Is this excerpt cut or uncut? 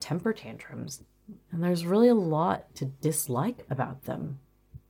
cut